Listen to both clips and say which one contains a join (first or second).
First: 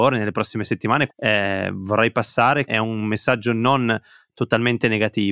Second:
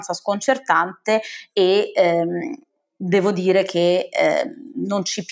first